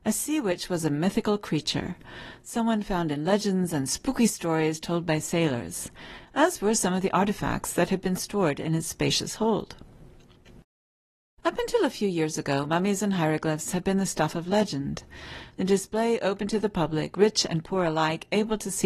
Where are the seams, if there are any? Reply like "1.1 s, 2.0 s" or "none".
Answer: 15.5 s

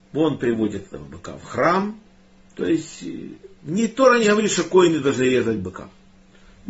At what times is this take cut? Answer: 2.5 s

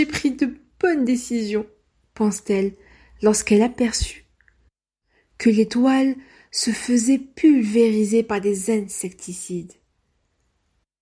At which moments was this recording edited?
none

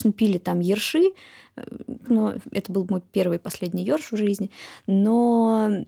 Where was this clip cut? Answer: 2.0 s

